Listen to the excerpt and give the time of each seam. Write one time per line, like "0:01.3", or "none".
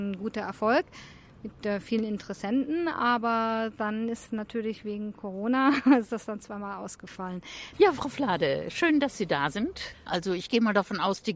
0:07.7
0:10.1